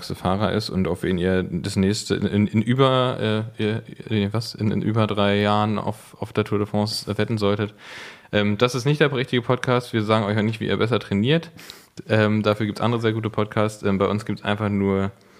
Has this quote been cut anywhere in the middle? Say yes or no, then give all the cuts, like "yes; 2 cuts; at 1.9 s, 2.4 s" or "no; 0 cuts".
no; 0 cuts